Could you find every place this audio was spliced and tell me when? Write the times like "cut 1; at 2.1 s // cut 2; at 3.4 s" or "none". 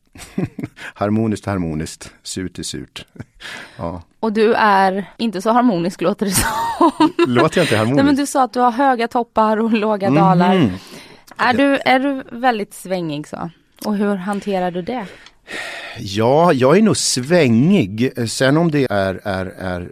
cut 1; at 5.2 s // cut 2; at 18.9 s